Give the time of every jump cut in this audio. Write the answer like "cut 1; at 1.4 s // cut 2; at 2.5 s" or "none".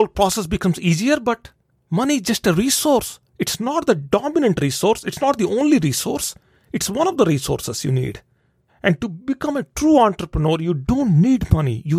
cut 1; at 8.7 s

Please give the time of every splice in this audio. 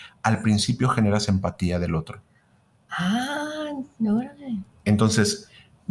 none

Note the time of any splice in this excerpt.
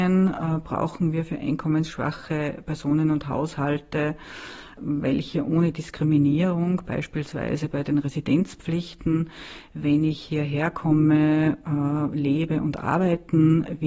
none

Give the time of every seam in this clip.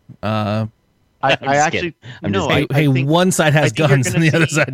cut 1; at 1.2 s

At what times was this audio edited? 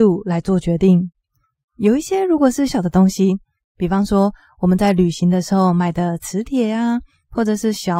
cut 1; at 2.7 s

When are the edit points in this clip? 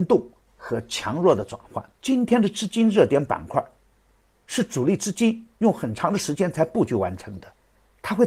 cut 1; at 1.9 s

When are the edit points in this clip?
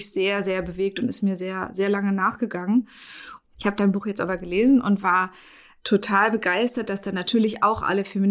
cut 1; at 3.4 s

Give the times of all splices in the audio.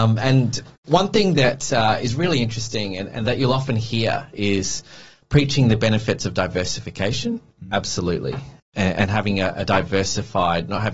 none

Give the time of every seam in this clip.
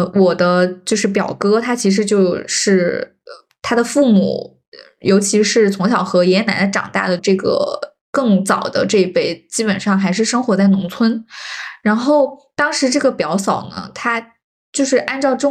cut 1; at 7.2 s

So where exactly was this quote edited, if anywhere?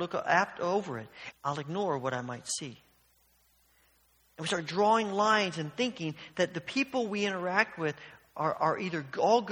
cut 1; at 1.3 s

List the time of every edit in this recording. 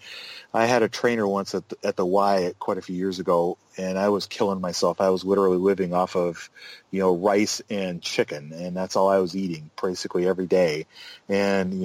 none

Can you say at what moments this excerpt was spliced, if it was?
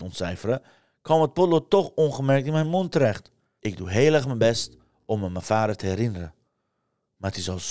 cut 1; at 3.6 s

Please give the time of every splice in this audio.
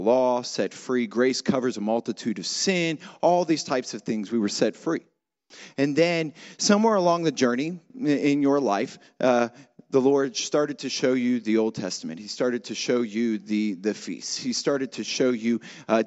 none

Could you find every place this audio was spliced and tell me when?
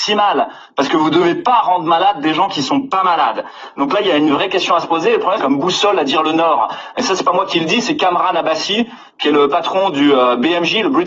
cut 1; at 5.4 s

